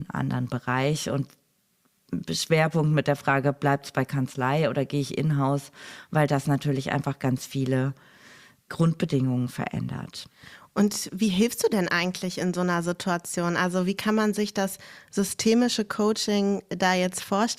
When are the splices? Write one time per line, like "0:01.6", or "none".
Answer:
none